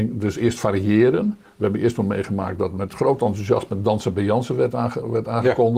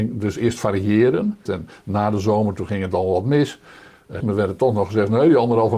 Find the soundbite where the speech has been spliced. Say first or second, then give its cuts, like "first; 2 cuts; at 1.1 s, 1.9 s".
second; 2 cuts; at 1.5 s, 4.2 s